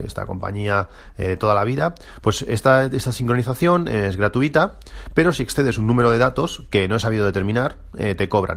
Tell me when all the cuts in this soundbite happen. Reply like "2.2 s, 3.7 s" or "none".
none

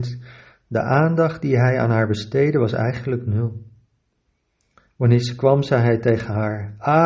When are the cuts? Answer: none

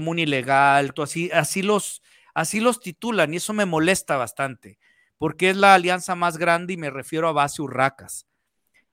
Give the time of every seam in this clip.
1.0 s

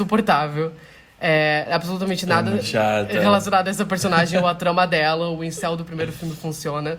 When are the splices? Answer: none

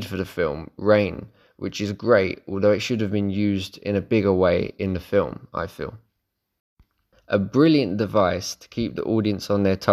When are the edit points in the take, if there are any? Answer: 7.1 s

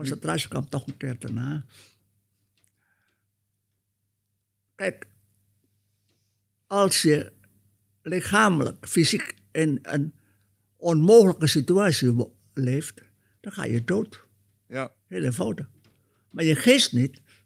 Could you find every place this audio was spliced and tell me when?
none

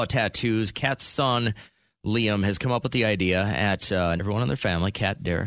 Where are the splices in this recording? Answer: 4.2 s

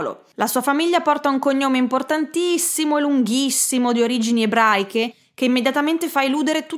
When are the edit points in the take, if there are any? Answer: none

